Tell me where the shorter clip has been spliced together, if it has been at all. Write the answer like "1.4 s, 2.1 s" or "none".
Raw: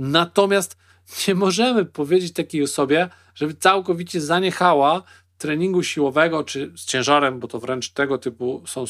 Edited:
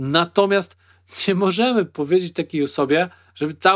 none